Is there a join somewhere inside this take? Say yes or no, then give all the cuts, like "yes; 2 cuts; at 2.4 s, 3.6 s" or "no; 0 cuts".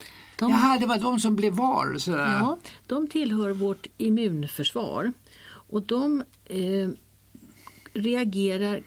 no; 0 cuts